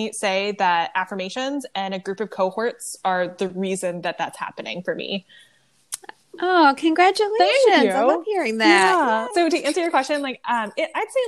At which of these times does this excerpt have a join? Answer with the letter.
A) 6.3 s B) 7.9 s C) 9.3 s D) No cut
C